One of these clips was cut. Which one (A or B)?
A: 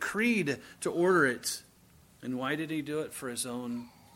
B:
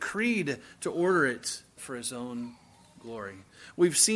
B